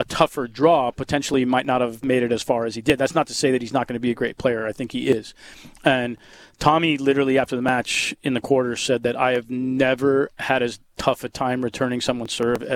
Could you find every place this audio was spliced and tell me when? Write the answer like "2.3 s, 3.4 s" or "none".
none